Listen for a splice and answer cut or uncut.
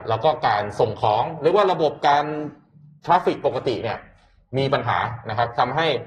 uncut